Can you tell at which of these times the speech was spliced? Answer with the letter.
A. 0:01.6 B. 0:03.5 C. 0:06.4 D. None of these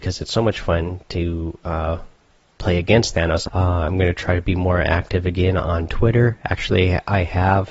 B